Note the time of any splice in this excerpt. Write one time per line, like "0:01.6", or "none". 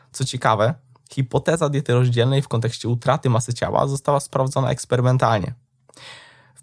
none